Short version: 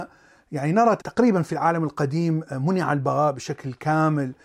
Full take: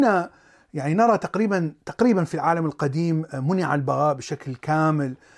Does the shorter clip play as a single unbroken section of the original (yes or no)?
no